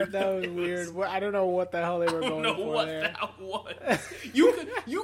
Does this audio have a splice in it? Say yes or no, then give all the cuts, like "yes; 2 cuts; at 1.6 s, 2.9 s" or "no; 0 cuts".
no; 0 cuts